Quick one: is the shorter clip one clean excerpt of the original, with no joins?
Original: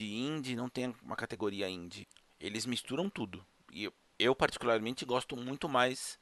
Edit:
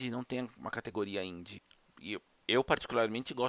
no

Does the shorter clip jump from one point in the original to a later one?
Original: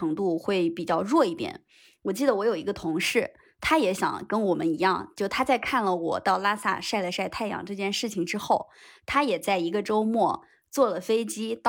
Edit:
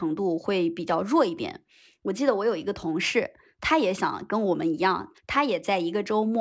yes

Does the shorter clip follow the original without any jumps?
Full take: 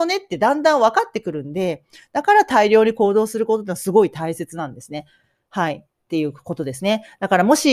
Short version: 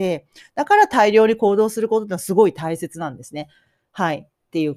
yes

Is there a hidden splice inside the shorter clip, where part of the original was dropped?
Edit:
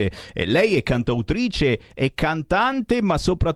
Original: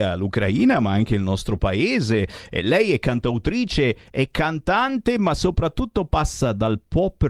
no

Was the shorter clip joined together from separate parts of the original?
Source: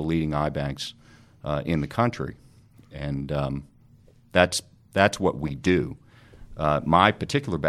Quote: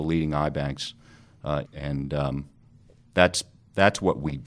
yes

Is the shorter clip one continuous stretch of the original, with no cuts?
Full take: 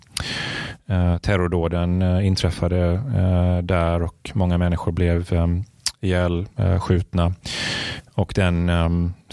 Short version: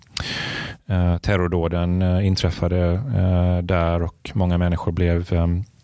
yes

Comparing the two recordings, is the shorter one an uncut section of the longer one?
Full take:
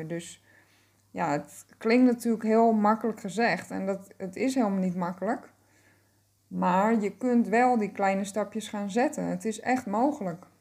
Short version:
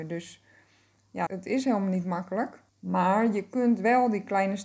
no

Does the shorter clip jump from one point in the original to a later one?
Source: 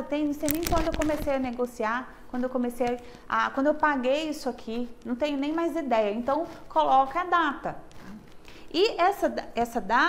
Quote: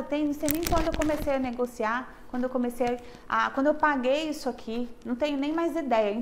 no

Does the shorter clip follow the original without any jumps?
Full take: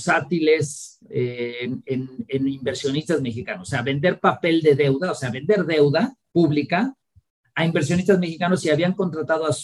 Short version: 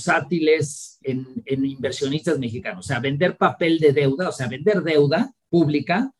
no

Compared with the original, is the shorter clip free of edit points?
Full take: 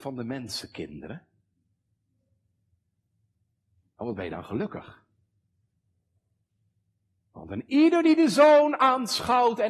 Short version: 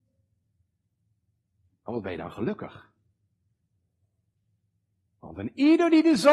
yes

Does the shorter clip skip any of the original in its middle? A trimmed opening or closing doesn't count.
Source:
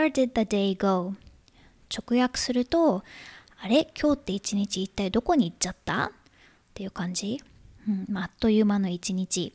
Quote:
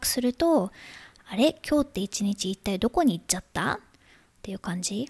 no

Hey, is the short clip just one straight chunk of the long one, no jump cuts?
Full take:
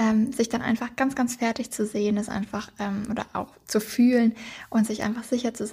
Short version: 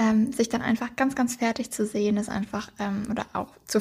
yes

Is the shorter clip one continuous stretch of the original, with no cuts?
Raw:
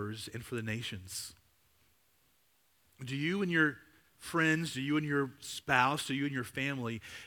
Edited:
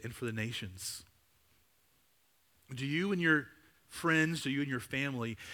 no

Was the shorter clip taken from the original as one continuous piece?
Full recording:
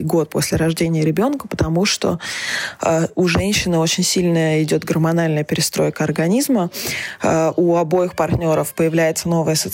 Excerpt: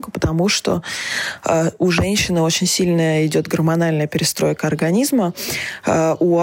yes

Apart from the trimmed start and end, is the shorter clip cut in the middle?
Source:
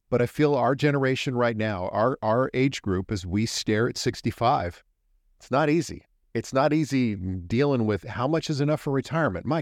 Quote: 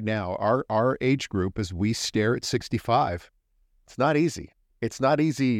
no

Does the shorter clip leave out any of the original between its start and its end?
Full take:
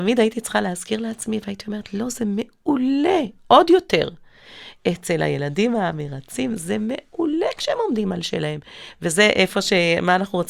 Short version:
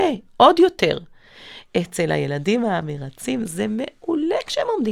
no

